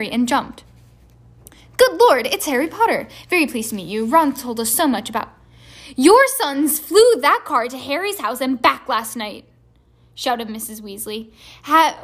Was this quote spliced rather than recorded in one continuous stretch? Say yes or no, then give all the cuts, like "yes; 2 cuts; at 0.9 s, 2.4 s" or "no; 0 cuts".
no; 0 cuts